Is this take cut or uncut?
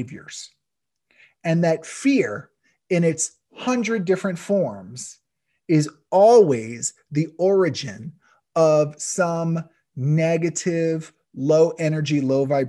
uncut